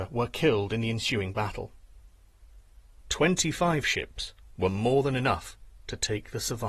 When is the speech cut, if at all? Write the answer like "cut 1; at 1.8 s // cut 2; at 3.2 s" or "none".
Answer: cut 1; at 2.9 s